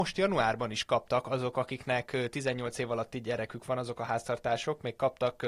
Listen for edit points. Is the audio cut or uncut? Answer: uncut